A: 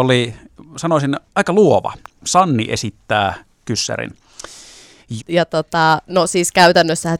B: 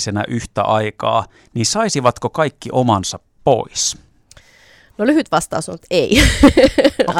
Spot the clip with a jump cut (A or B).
A